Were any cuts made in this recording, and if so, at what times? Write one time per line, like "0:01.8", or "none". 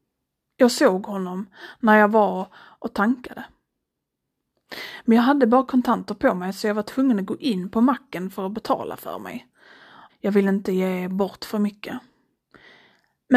0:10.1